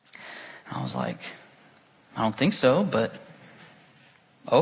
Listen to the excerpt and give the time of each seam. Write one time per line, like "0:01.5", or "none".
none